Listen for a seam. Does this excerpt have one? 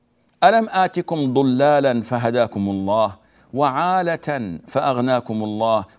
no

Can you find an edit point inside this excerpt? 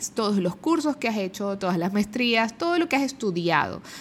yes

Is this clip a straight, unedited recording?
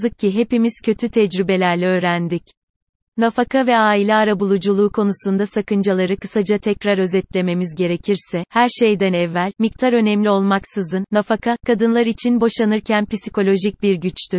yes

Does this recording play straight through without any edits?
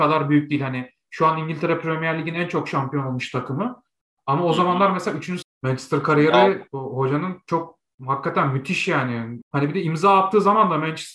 no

